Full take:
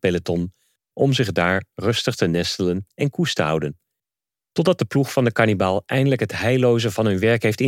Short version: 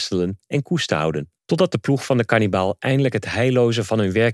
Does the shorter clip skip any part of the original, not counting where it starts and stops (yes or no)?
yes